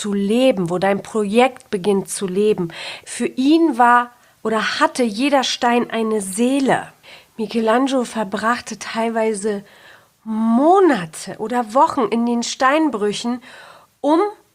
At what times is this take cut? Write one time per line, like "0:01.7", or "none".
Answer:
0:03.0